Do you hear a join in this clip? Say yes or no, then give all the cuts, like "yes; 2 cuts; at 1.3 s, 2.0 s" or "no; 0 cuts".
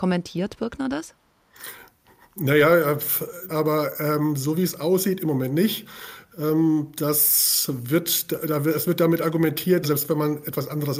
yes; 2 cuts; at 3.5 s, 9.8 s